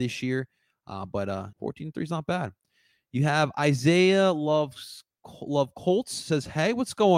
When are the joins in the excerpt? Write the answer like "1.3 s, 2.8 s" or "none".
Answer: 1.5 s